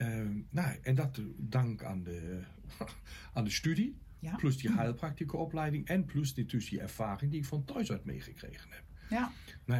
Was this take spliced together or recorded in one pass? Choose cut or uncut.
uncut